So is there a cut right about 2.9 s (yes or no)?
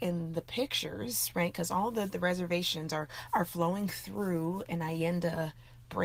no